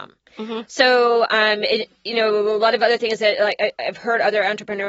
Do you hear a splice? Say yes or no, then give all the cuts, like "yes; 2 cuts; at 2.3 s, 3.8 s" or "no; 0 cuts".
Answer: no; 0 cuts